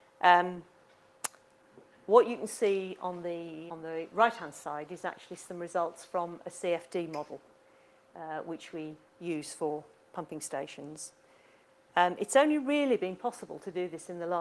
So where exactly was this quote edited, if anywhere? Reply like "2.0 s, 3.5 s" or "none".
3.7 s